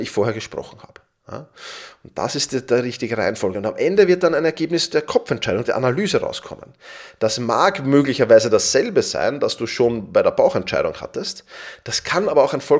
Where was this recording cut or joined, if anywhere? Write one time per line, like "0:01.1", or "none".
none